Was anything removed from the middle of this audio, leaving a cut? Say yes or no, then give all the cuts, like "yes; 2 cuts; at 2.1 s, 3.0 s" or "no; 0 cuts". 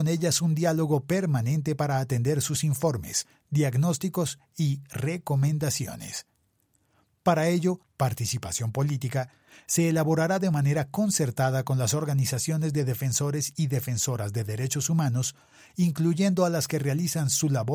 yes; 1 cut; at 7.8 s